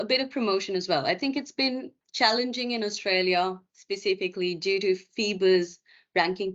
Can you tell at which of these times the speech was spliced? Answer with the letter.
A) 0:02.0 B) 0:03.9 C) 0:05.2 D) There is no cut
A